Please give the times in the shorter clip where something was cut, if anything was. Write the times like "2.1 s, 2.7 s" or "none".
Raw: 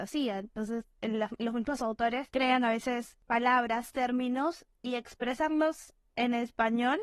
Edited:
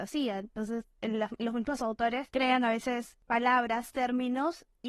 none